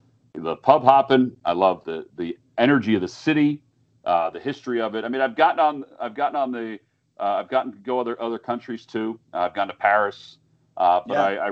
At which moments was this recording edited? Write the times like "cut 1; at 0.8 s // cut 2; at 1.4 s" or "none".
none